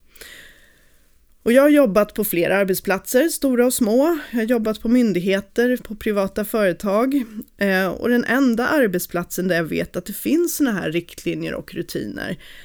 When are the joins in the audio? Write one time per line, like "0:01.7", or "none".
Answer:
0:05.8